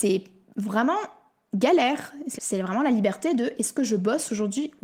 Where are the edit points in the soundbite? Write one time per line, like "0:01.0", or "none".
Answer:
0:02.4